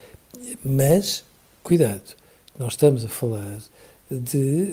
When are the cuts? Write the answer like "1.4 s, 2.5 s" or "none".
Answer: none